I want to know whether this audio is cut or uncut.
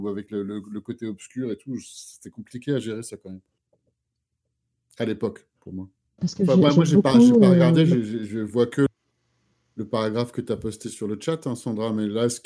cut